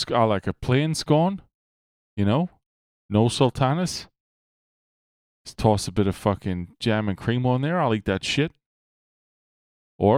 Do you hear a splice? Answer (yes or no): no